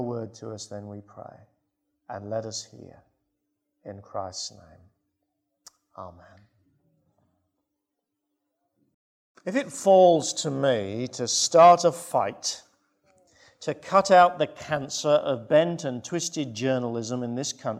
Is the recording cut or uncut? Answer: uncut